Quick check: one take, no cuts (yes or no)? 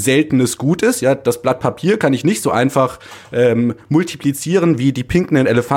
yes